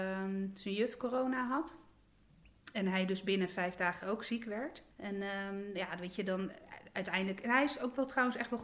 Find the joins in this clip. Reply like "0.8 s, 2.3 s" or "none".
4.9 s